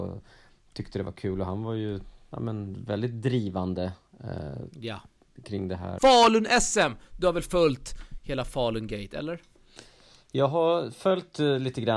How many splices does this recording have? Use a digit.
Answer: 1